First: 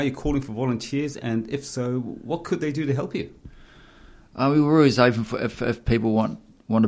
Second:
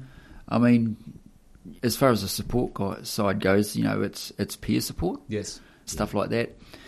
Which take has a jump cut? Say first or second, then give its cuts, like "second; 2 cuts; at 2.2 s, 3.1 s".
second; 2 cuts; at 1.8 s, 5.9 s